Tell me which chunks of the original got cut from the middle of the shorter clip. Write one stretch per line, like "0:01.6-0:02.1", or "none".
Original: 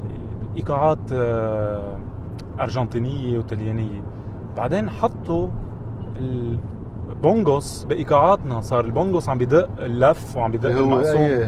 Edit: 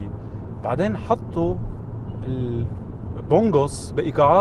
none